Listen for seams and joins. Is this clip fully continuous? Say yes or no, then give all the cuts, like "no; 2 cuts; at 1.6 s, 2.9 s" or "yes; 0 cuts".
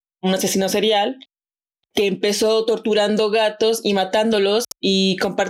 yes; 0 cuts